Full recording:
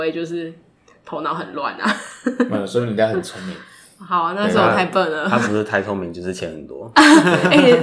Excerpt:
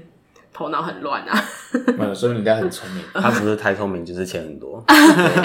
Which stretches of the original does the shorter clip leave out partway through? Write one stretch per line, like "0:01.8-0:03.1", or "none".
0:03.7-0:05.2